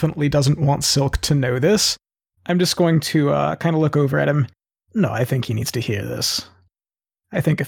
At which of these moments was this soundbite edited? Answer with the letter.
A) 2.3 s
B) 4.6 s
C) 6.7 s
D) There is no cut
D